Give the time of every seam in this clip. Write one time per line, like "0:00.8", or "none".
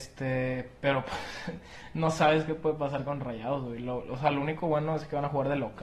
none